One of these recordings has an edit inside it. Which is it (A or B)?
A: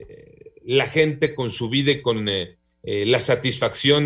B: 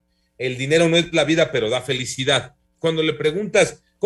B